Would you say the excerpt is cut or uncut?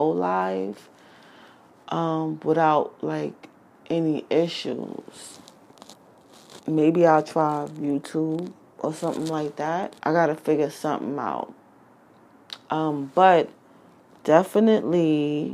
cut